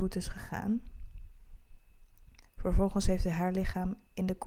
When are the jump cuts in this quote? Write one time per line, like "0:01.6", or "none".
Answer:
0:02.4